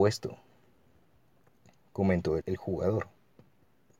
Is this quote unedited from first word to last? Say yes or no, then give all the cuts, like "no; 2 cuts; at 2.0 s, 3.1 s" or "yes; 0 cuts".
no; 1 cut; at 2.4 s